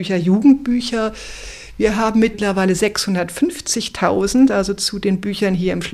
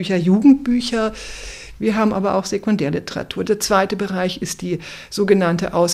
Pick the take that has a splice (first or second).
second